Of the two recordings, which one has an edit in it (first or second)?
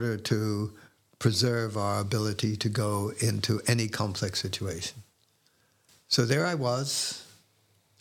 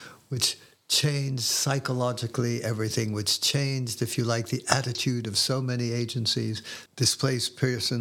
second